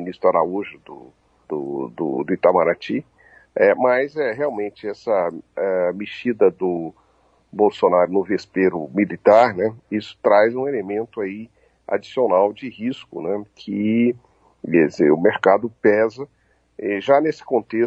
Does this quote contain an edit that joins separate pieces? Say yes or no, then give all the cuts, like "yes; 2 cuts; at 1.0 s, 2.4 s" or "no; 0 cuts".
no; 0 cuts